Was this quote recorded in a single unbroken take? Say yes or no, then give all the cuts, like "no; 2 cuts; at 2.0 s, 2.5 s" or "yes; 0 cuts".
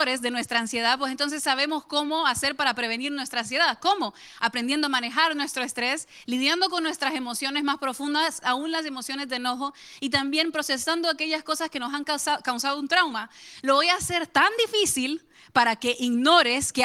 no; 2 cuts; at 8.4 s, 13.6 s